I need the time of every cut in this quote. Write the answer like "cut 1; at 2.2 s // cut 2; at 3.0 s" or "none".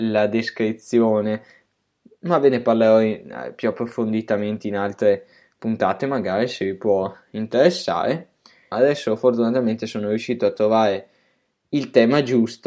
cut 1; at 8.7 s